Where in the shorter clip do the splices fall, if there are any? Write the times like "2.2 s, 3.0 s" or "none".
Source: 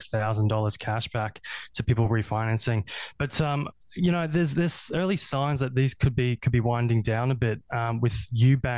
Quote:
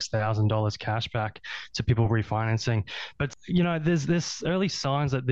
3.3 s